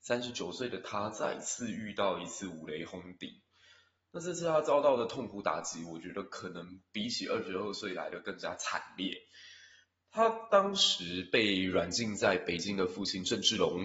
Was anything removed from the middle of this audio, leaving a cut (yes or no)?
no